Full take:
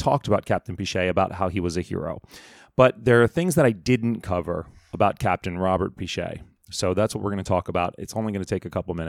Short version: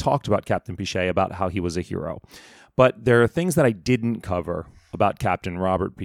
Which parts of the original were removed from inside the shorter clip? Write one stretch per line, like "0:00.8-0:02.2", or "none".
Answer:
none